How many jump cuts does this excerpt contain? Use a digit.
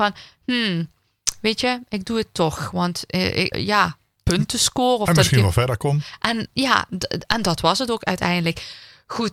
1